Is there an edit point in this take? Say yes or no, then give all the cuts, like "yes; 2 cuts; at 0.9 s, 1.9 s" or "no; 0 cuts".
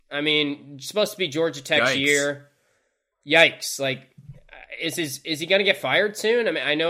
no; 0 cuts